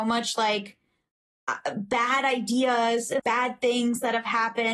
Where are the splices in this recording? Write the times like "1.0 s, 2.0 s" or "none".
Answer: 3.2 s